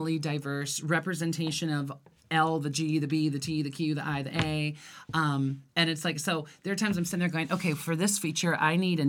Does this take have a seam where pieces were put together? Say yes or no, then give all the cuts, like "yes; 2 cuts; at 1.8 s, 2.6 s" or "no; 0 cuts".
no; 0 cuts